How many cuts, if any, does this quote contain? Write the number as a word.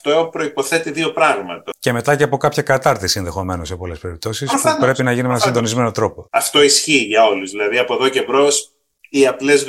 two